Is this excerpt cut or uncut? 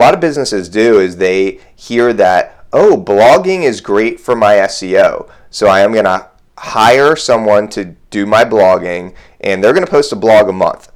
uncut